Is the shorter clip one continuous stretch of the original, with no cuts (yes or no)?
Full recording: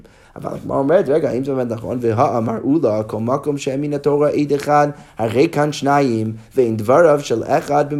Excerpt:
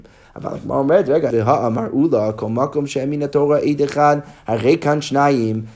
no